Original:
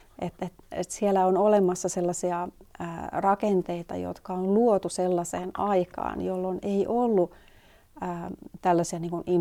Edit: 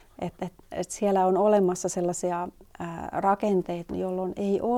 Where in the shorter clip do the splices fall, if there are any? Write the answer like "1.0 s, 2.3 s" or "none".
3.9 s